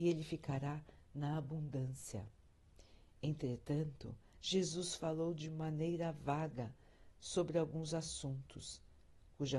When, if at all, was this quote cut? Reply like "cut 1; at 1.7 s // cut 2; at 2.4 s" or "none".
cut 1; at 4.3 s